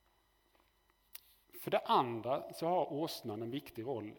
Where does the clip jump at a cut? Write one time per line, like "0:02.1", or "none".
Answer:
none